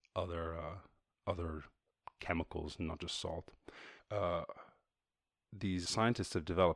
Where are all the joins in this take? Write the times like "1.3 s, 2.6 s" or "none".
4.0 s, 5.9 s